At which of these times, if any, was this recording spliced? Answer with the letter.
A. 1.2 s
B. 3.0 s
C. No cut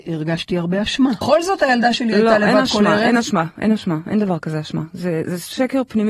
A